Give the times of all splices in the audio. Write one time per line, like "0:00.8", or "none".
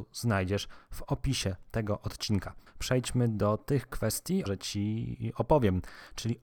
0:02.7
0:04.5